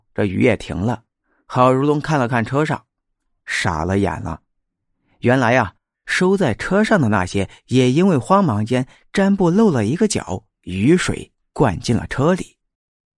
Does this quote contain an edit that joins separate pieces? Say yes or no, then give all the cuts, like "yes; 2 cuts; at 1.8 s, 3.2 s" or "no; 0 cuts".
yes; 1 cut; at 5.9 s